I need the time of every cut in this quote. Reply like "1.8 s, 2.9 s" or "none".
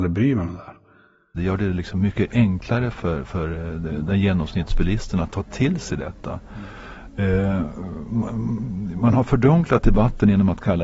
1.4 s